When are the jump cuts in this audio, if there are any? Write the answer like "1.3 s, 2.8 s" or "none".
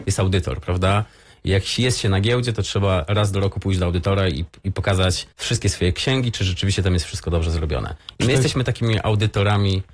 5.3 s